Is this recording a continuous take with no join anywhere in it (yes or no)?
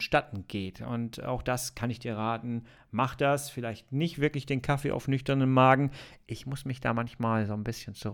yes